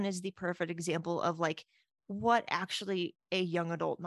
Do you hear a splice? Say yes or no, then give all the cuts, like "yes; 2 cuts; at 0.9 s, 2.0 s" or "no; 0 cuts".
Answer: no; 0 cuts